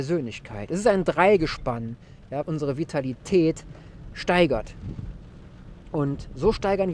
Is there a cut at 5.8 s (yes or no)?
no